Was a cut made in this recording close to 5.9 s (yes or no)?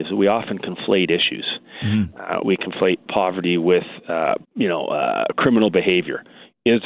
no